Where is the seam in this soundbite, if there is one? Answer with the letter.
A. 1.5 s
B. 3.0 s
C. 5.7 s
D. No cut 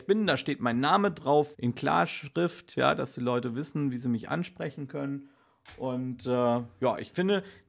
A